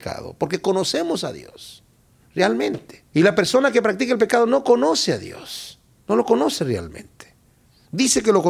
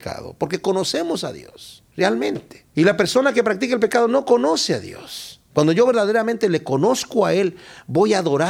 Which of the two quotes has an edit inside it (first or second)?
second